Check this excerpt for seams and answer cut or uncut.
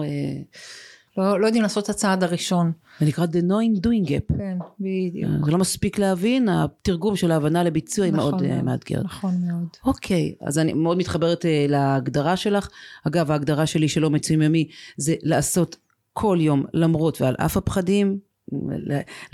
cut